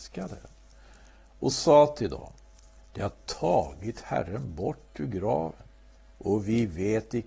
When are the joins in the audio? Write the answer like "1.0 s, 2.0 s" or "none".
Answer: none